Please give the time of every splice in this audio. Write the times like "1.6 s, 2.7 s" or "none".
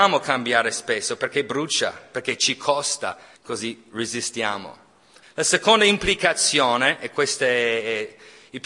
3.3 s, 5.2 s